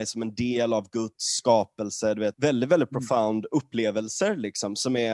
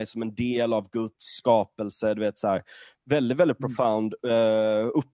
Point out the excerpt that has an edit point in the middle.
first; 2 cuts; at 2.3 s, 3.5 s

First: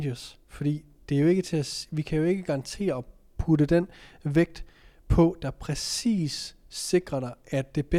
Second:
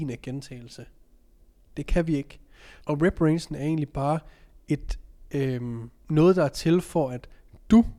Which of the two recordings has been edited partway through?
second; 1 cut; at 2.8 s

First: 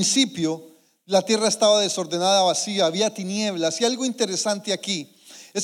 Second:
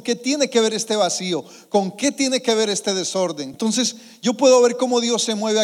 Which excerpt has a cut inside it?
second; 1 cut; at 3.5 s

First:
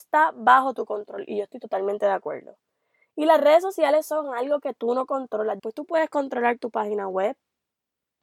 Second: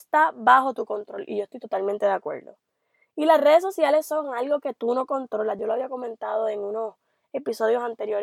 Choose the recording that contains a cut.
first; 1 cut; at 5.6 s

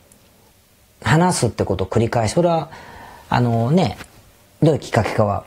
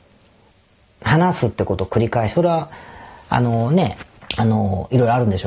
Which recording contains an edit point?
second; 1 cut; at 4.2 s

